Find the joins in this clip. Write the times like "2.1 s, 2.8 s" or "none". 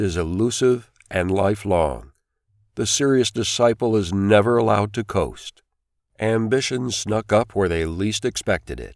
6.0 s